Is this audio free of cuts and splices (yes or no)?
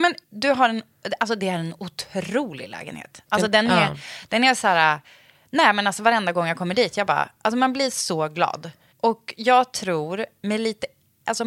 yes